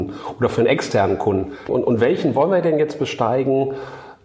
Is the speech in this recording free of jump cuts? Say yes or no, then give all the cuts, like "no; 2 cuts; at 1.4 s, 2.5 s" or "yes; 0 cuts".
no; 1 cut; at 1.7 s